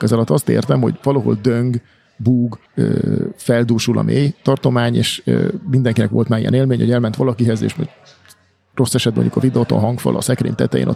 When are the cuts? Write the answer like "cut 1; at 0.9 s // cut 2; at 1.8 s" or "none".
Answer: cut 1; at 2.7 s